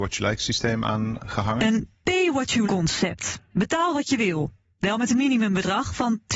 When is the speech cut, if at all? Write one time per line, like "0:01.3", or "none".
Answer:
0:02.6